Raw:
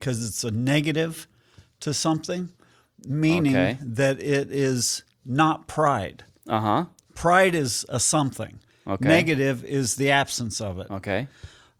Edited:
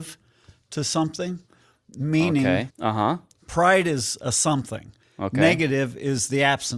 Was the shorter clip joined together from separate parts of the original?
yes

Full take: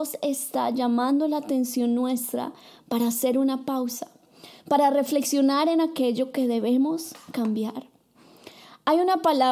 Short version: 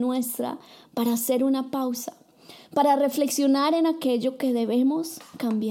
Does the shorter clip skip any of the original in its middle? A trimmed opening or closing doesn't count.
no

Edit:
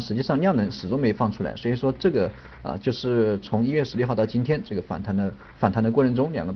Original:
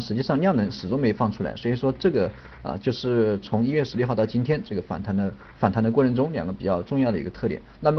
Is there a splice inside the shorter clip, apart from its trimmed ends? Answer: no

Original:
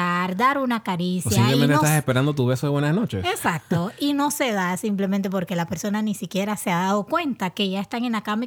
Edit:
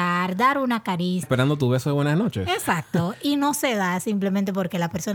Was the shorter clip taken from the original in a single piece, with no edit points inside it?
no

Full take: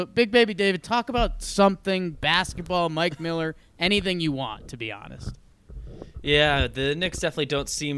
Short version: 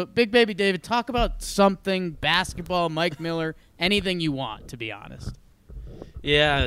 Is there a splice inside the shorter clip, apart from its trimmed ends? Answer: no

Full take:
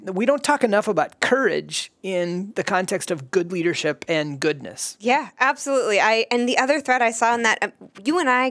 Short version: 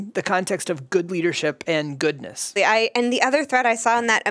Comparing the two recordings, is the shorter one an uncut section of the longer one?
no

